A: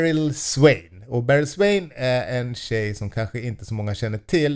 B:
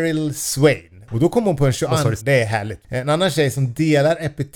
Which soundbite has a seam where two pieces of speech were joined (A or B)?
B